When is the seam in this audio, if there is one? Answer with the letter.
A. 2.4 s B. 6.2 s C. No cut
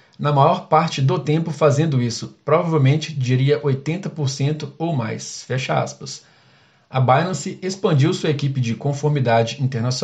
C